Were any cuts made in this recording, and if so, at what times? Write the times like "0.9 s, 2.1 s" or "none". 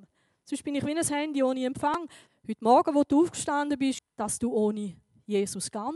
2.3 s, 4.0 s